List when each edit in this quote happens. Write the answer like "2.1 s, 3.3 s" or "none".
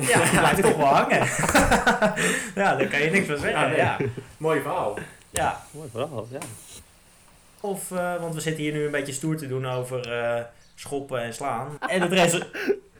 7.6 s, 11.8 s